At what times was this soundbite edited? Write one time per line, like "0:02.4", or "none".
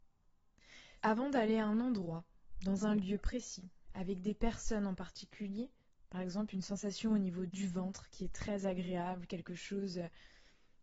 0:01.0
0:06.0
0:07.5